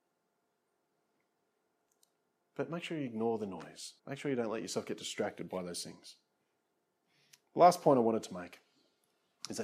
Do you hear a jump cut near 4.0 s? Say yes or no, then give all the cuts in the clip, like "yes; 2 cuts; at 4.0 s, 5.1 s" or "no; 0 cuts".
yes; 1 cut; at 4.0 s